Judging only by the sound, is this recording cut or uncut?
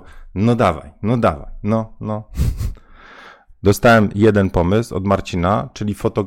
cut